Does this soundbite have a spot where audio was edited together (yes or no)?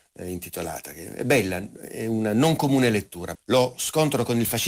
yes